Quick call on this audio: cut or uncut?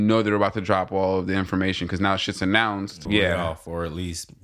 cut